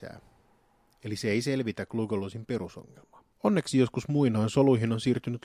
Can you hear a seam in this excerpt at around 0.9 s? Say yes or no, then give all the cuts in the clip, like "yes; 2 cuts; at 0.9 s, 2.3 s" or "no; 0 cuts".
no; 1 cut; at 3.3 s